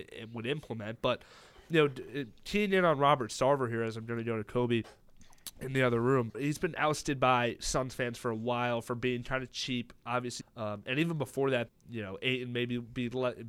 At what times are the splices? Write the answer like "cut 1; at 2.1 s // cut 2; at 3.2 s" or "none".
cut 1; at 6.3 s // cut 2; at 10.4 s // cut 3; at 11.7 s